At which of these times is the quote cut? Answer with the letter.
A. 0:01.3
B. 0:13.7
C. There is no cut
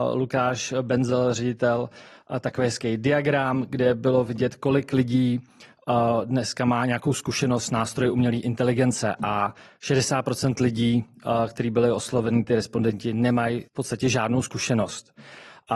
B